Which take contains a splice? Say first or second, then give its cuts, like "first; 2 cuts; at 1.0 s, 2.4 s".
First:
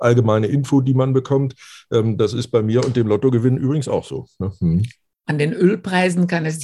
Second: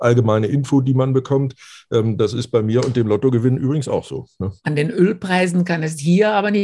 second; 1 cut; at 4.6 s